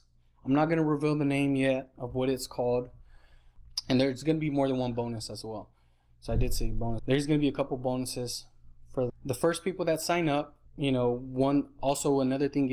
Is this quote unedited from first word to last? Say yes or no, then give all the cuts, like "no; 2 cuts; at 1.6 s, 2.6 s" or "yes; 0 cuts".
no; 3 cuts; at 7.0 s, 9.1 s, 10.7 s